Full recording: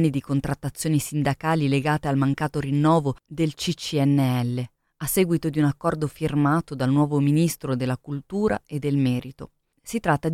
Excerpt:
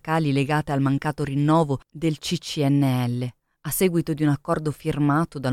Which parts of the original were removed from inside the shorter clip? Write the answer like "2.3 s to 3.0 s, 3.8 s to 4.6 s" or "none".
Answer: none